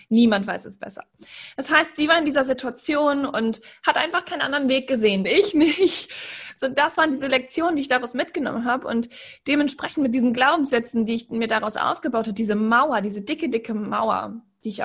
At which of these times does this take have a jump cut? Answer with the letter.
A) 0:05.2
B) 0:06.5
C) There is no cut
A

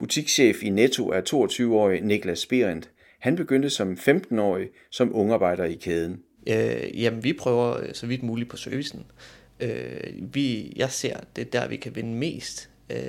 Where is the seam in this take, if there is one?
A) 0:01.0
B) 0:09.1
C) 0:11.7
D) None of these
D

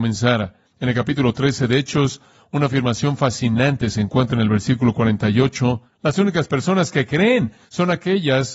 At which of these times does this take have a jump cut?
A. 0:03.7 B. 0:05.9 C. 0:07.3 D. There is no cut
B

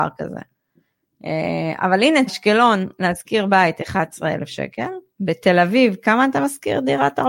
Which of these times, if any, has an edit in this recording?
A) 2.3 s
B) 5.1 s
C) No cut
A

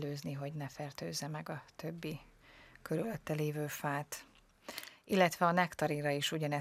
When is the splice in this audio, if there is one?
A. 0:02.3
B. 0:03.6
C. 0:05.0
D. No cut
D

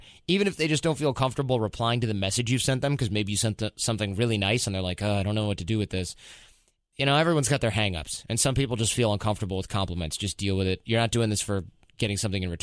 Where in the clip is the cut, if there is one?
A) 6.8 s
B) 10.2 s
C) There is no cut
C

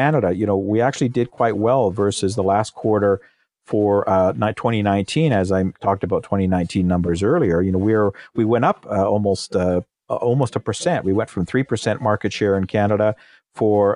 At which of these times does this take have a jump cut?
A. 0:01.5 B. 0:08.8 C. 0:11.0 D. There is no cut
D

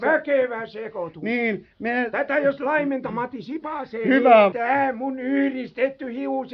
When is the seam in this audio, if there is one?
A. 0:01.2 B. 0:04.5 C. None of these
B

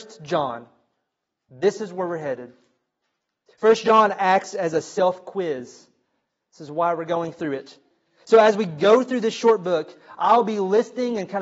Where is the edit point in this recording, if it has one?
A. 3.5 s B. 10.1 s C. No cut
C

